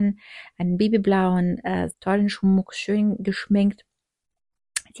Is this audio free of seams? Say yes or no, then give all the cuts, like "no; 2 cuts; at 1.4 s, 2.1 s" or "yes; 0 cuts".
no; 1 cut; at 1.9 s